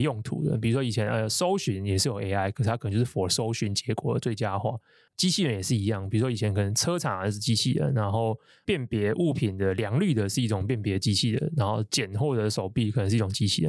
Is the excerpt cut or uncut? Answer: uncut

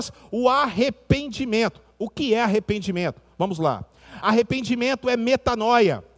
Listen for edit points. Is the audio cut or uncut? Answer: uncut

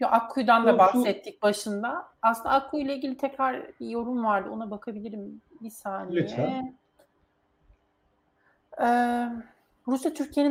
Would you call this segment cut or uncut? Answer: uncut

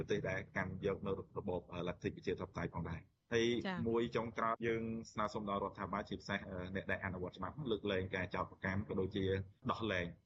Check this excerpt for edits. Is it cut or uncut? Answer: cut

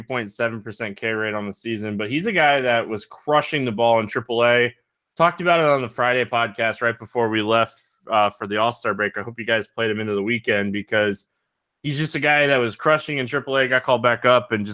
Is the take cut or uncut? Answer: uncut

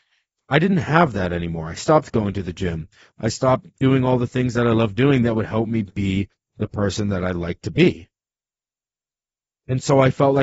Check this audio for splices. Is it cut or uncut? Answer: cut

